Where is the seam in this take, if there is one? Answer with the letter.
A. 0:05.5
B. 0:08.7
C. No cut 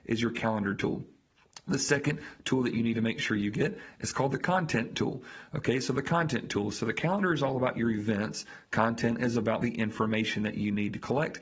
C